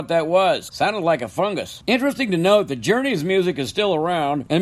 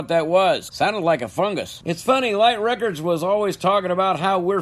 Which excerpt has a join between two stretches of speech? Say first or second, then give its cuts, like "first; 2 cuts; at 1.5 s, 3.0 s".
second; 1 cut; at 1.8 s